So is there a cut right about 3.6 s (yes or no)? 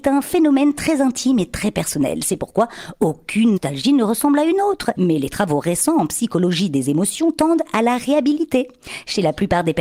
yes